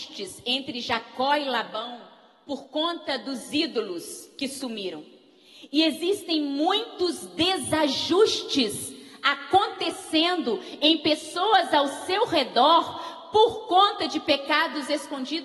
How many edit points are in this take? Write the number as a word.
zero